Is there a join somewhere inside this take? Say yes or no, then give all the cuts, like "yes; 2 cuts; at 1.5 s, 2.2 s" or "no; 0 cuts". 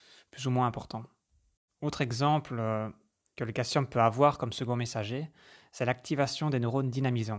yes; 1 cut; at 1.7 s